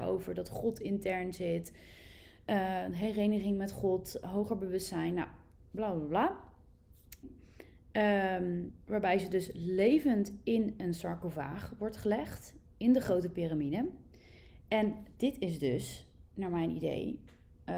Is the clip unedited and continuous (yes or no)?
no